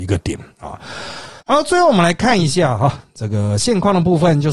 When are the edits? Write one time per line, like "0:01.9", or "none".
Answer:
0:01.4